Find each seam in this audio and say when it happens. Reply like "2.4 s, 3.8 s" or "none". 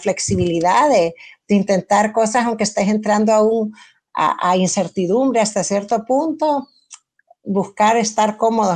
none